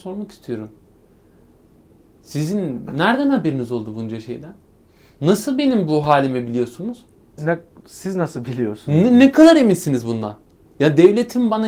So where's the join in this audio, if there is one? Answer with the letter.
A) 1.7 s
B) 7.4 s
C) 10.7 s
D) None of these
B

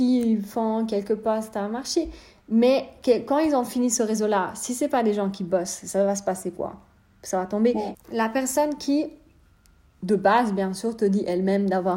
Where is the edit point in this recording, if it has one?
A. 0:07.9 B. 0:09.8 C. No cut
A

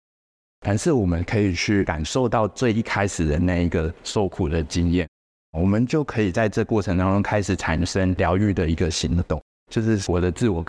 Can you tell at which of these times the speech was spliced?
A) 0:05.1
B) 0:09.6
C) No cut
B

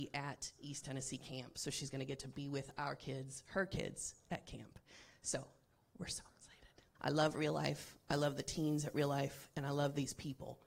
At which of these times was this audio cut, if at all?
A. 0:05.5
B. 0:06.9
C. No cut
B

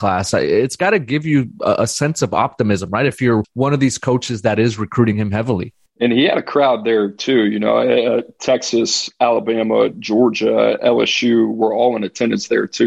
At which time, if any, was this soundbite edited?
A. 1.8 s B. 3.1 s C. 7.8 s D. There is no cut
D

